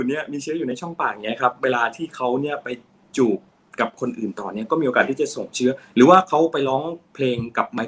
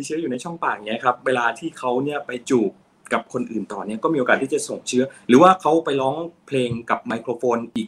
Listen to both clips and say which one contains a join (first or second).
second